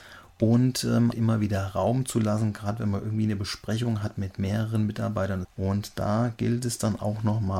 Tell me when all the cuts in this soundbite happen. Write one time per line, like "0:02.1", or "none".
0:01.1
0:05.4